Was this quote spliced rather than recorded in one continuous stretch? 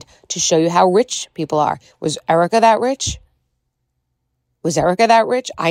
no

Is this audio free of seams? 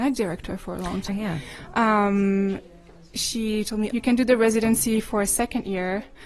no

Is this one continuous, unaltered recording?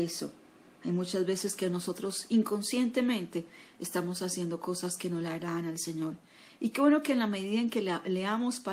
yes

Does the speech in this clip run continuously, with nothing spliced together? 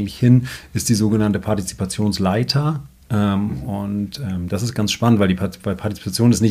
yes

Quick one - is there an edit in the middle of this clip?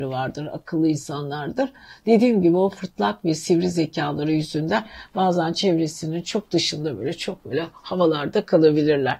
no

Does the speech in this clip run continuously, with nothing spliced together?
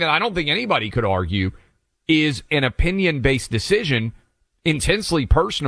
yes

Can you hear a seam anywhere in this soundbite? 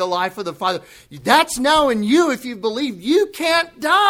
no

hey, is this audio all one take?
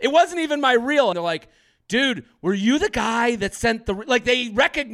no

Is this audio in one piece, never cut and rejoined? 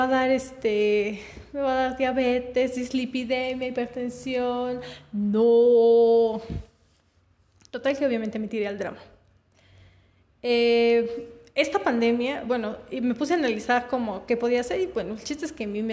yes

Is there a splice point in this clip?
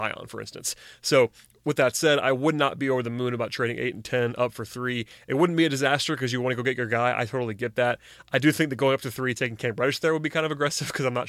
no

